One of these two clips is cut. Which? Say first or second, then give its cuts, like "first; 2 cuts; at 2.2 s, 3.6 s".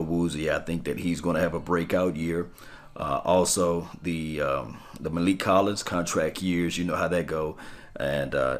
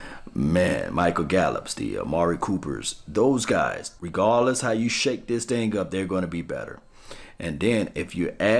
second; 1 cut; at 4.0 s